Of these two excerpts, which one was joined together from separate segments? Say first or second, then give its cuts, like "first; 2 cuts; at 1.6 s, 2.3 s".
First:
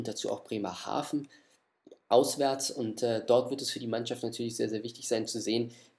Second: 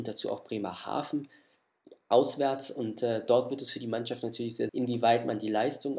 second; 1 cut; at 4.7 s